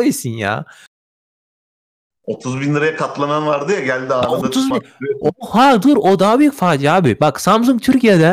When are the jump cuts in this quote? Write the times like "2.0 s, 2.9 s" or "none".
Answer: 4.7 s